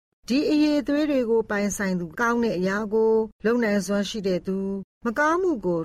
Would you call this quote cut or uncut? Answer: cut